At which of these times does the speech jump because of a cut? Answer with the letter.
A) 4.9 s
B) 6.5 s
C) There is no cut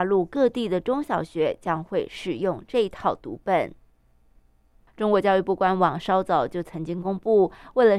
A